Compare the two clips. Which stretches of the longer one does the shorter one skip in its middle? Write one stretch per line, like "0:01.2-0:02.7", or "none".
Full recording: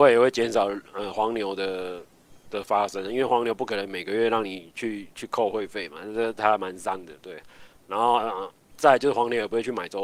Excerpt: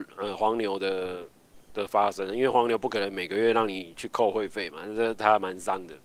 0:04.7-0:05.1